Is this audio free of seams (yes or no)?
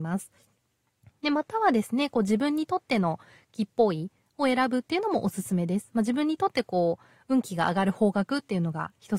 yes